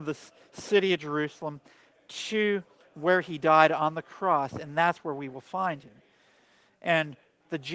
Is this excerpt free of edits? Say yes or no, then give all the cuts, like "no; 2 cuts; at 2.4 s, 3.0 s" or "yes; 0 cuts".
yes; 0 cuts